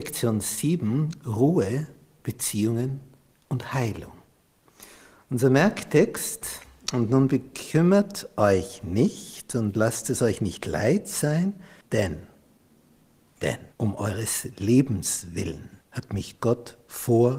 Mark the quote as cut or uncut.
cut